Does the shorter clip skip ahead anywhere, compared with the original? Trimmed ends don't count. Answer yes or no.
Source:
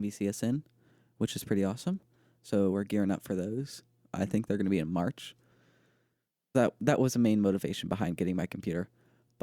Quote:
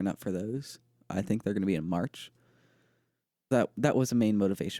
no